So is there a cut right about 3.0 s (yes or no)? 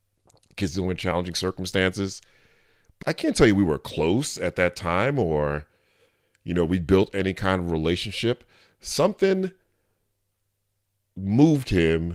yes